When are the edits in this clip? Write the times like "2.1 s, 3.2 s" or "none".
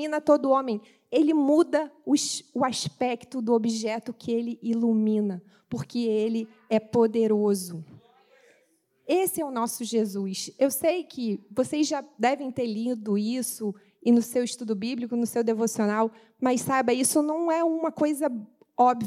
none